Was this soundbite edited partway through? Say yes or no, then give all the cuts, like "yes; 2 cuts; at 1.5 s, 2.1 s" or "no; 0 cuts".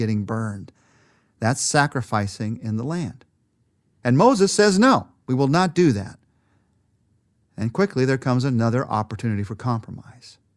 no; 0 cuts